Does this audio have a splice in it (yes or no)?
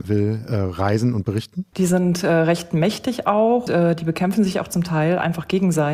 yes